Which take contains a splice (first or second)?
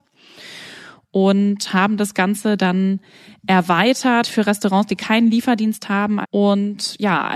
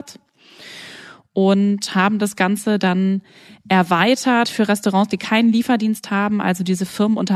first